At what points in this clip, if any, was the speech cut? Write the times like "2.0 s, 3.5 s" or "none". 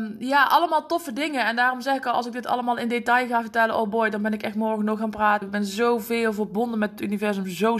5.4 s